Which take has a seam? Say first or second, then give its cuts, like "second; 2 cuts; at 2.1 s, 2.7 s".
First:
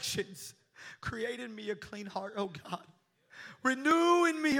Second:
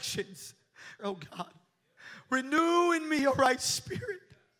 second; 1 cut; at 1.0 s